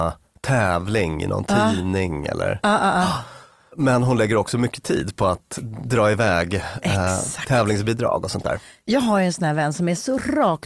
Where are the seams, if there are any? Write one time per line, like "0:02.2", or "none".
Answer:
none